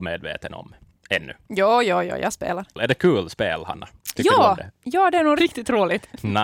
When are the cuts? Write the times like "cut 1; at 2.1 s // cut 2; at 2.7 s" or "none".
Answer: cut 1; at 5.4 s